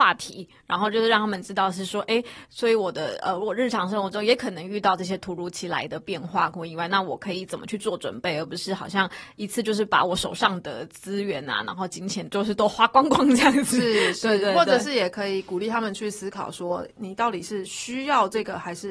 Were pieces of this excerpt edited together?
no; 0 cuts

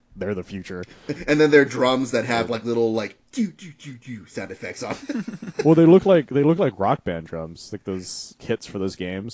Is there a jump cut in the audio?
no; 0 cuts

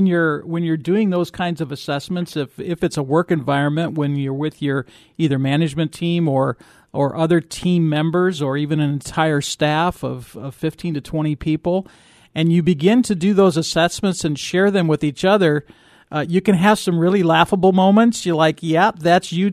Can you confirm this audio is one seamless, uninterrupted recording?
yes; 0 cuts

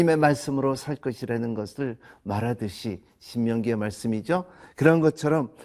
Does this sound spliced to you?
no; 0 cuts

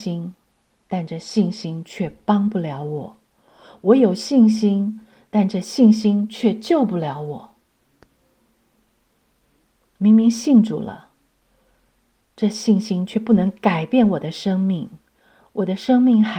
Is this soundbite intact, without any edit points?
yes; 0 cuts

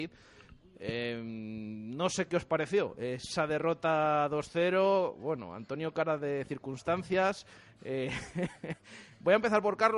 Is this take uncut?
yes; 0 cuts

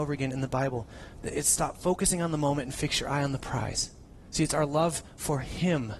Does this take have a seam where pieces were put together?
yes; 1 cut; at 4.3 s

